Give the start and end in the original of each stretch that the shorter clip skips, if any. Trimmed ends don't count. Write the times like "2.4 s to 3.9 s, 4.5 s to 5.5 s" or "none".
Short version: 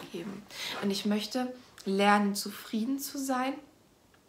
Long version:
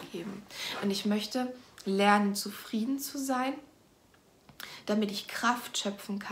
none